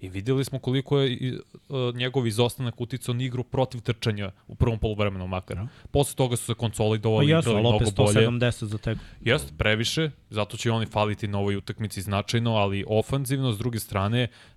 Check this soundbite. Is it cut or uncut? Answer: uncut